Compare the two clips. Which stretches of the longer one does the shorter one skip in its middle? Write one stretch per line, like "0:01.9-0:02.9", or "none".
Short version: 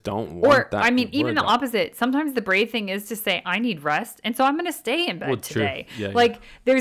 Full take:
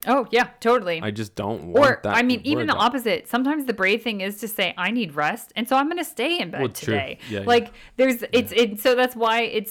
none